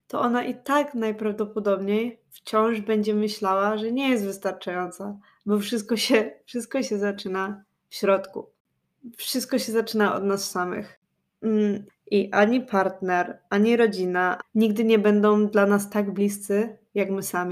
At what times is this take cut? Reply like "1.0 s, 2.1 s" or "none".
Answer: 11.9 s, 14.4 s